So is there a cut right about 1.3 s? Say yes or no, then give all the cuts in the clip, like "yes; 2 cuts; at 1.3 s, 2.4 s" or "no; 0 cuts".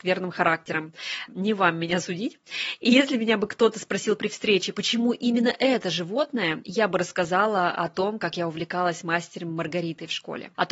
yes; 1 cut; at 1.3 s